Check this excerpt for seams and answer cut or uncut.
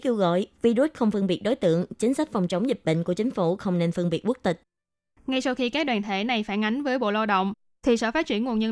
uncut